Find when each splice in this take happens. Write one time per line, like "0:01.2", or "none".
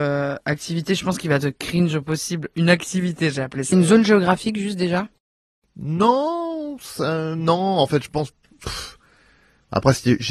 0:03.7